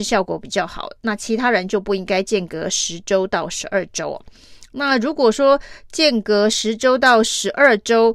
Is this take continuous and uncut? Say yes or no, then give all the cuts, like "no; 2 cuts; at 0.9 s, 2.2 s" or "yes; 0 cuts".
yes; 0 cuts